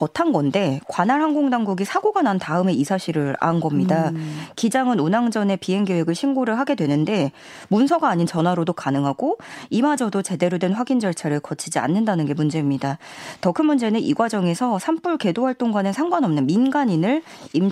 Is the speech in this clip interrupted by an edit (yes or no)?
no